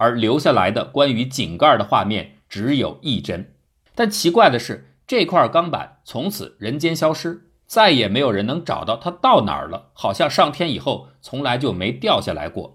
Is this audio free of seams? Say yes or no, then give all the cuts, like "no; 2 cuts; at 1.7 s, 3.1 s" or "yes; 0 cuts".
no; 1 cut; at 3.9 s